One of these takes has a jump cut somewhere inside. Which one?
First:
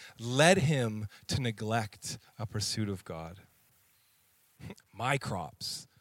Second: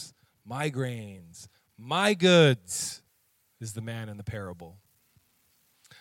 first; 1 cut; at 4.8 s

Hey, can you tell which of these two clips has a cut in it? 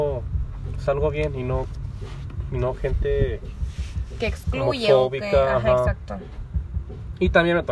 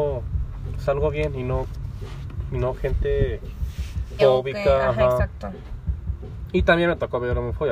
second; 1 cut; at 4.2 s

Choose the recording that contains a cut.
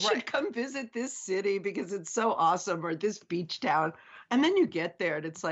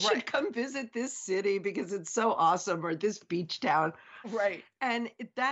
second; 1 cut; at 4.2 s

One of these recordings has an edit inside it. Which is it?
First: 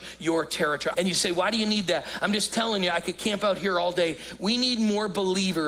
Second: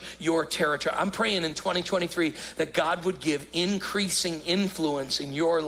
first; 1 cut; at 0.9 s

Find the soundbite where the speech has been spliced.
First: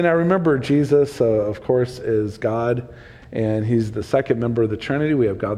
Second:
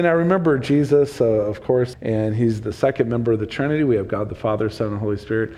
second; 1 cut; at 1.9 s

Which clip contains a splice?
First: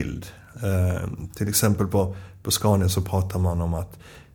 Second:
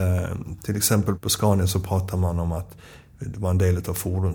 second; 1 cut; at 1.1 s

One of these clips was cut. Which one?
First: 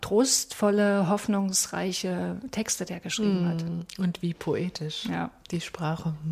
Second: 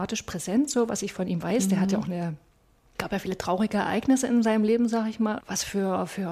second; 2 cuts; at 2.9 s, 5.4 s

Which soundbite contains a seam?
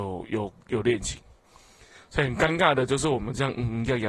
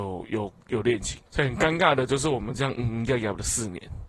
second; 1 cut; at 1.3 s

